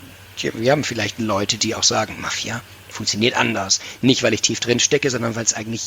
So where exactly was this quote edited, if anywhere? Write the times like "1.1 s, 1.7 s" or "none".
none